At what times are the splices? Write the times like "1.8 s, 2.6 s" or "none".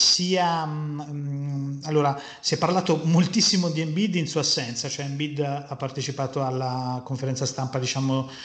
none